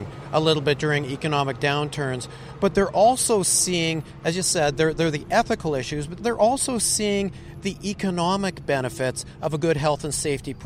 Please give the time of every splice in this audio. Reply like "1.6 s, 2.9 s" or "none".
6.2 s